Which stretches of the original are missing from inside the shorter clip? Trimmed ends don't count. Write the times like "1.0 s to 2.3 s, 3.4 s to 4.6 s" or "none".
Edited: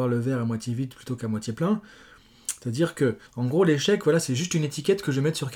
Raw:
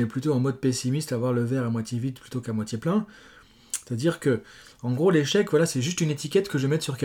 4.5 s to 4.7 s